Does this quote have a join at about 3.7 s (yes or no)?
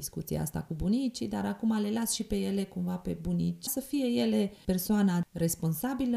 yes